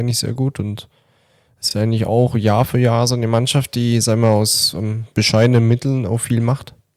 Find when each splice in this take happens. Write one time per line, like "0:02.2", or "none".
none